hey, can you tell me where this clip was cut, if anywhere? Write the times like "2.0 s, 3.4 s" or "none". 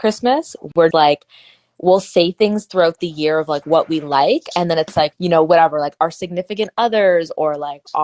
0.9 s, 5.1 s